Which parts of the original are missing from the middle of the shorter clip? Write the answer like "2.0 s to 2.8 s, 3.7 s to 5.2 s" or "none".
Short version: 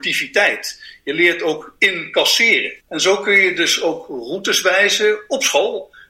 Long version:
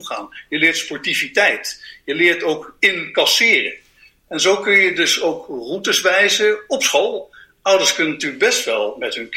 3.8 s to 4.2 s